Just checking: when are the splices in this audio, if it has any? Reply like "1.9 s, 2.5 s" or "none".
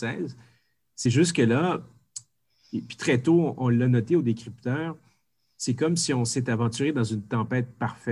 none